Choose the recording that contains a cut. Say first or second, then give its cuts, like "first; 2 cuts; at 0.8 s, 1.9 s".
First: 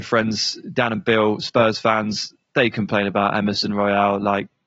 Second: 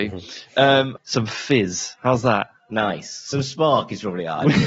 second; 1 cut; at 1.0 s